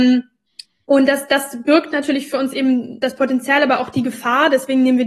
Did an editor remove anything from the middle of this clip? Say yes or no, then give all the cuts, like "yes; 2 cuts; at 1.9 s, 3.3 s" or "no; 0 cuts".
no; 0 cuts